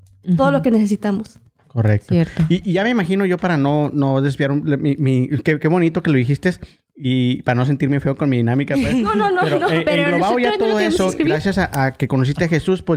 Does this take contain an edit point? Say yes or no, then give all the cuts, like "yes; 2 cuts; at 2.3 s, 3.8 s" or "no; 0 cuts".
no; 0 cuts